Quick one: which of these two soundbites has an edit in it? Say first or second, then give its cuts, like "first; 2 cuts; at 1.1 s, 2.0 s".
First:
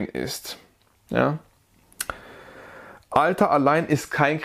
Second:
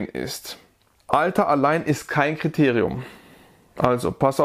second; 1 cut; at 1.0 s